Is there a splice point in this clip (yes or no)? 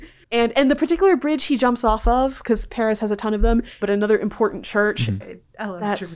yes